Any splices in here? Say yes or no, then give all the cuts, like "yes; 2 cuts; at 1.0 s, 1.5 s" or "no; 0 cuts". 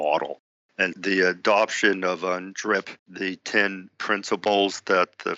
yes; 2 cuts; at 0.9 s, 3.0 s